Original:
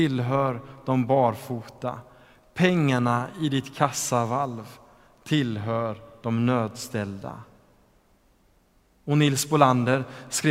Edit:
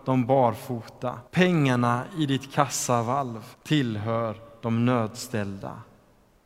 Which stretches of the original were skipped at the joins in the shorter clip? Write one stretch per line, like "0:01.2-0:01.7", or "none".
0:02.1-0:02.5
0:04.8-0:05.1